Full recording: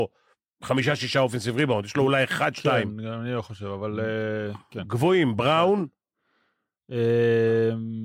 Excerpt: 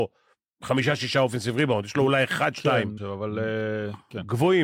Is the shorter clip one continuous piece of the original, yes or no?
no